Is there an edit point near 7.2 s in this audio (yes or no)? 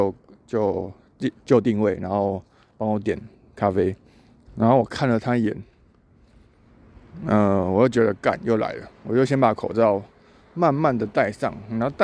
no